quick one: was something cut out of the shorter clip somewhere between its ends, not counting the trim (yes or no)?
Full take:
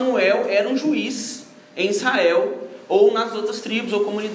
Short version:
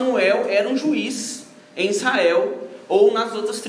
no